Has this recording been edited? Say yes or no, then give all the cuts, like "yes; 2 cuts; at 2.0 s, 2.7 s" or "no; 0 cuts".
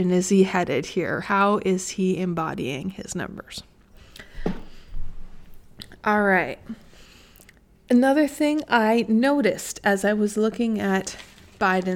no; 0 cuts